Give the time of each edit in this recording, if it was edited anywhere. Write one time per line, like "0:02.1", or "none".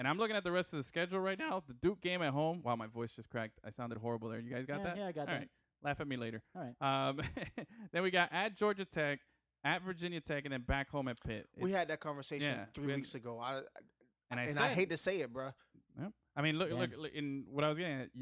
0:15.9